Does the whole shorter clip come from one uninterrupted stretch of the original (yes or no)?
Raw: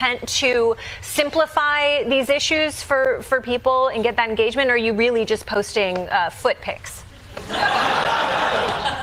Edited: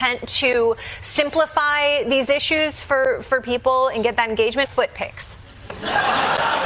no